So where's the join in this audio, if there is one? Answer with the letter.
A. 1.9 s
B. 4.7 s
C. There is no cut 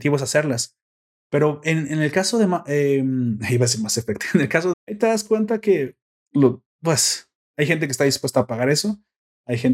B